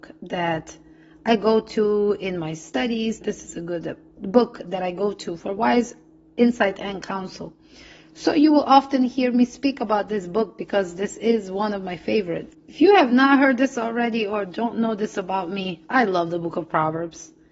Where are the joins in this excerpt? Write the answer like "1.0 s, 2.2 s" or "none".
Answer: 3.2 s, 12.5 s